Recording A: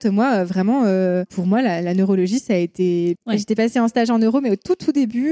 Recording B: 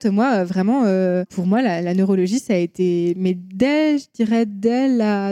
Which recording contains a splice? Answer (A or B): A